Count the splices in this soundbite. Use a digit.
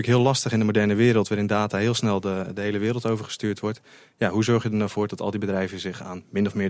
0